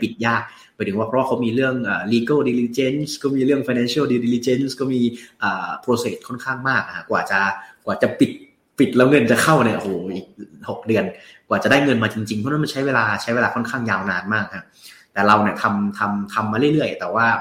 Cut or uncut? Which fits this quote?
uncut